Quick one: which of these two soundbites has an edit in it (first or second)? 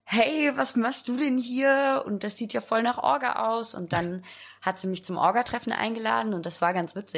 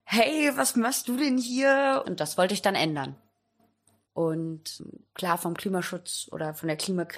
second